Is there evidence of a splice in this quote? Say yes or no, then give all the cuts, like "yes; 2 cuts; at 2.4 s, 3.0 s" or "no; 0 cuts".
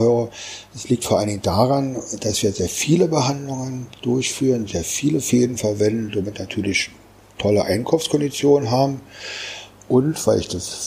no; 0 cuts